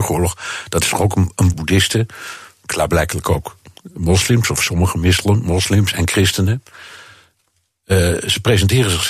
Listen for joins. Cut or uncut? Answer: cut